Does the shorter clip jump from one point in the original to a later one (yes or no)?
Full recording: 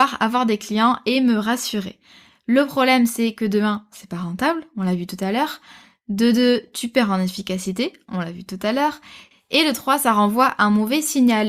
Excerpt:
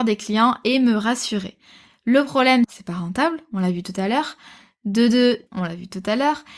yes